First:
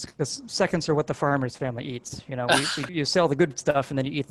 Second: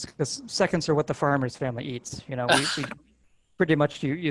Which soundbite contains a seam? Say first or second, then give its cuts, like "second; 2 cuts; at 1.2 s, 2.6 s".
first; 1 cut; at 2.9 s